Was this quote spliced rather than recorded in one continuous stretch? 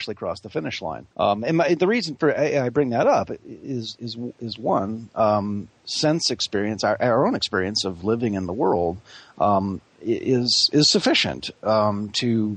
yes; 1 cut; at 1.1 s

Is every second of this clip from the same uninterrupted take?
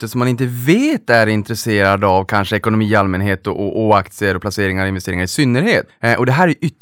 no; 1 cut; at 5.9 s

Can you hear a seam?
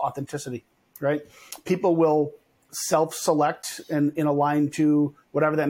no; 0 cuts

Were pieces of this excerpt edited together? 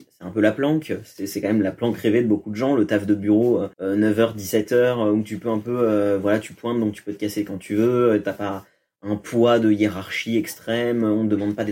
yes; 1 cut; at 3.7 s

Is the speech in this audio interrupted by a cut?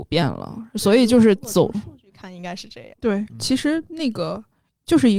yes; 1 cut; at 2.9 s

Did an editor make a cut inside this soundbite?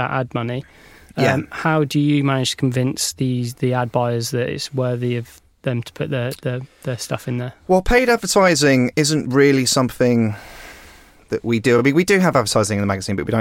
no; 0 cuts

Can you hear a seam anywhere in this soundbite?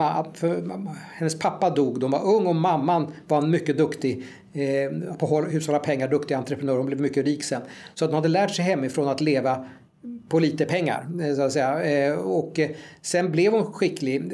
no; 0 cuts

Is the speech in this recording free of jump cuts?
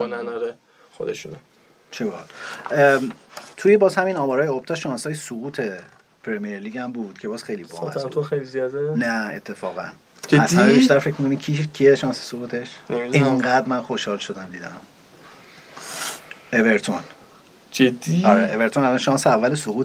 yes; 0 cuts

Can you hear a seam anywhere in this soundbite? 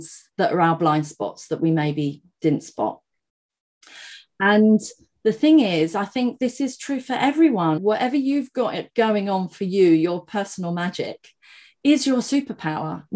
yes; 1 cut; at 7.8 s

